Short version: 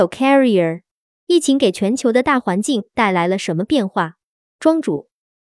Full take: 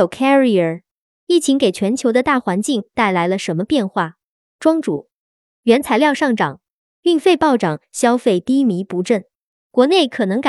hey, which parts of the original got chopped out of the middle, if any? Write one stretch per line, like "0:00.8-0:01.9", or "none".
none